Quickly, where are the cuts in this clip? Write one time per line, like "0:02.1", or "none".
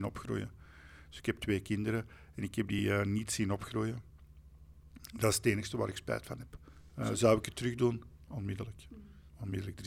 none